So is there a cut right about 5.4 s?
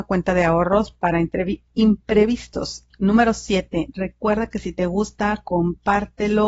no; 2 cuts; at 2.9 s, 3.9 s

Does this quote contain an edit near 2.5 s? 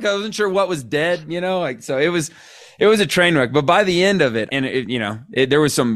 no; 1 cut; at 4.5 s

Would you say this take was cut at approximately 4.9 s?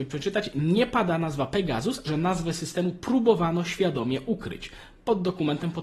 no; 1 cut; at 2.0 s

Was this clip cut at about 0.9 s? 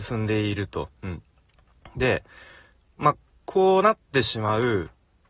yes; 1 cut; at 0.9 s

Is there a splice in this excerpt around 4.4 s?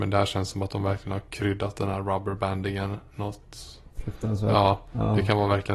no; 0 cuts

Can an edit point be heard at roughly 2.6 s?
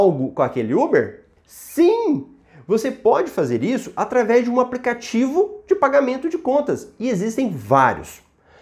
no; 1 cut; at 1.4 s

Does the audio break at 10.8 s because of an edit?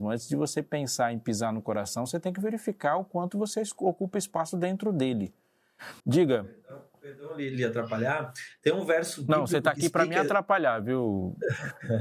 no; 1 cut; at 6.0 s

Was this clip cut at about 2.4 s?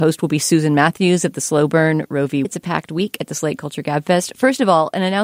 yes; 1 cut; at 2.4 s

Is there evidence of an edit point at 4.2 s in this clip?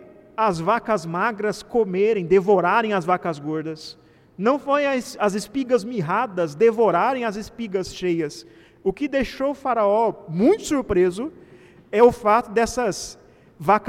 no; 0 cuts

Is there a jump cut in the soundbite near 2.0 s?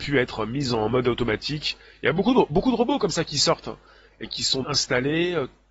no; 1 cut; at 4.6 s

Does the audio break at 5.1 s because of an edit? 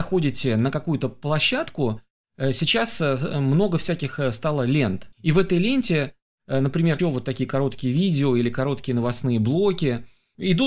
yes; 2 cuts; at 5.1 s, 7.0 s

